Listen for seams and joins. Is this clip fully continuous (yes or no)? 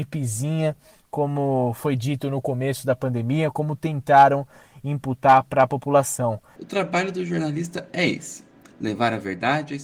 yes